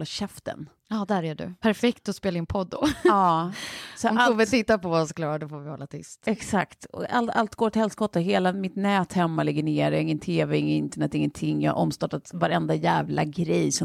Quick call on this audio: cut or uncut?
cut